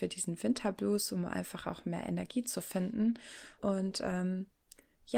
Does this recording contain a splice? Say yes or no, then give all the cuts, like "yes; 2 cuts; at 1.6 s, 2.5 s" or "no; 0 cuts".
yes; 1 cut; at 3.6 s